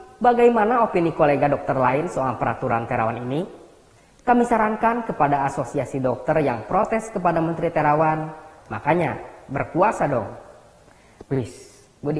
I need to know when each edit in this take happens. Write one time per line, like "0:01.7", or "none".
0:11.3

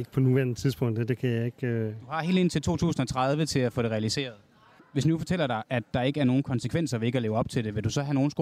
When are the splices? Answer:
0:04.8

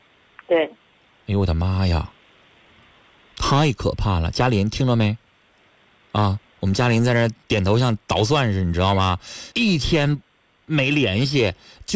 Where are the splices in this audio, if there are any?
0:07.4
0:09.5

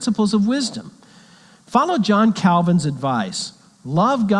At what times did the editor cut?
none

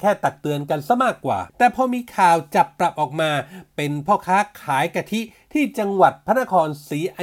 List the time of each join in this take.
0:01.5

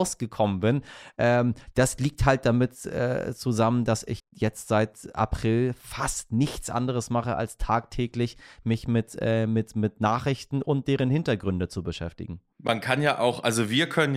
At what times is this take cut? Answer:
0:04.2

